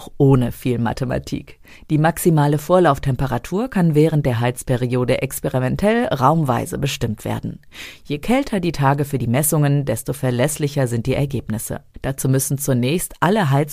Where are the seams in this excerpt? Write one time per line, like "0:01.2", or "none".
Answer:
none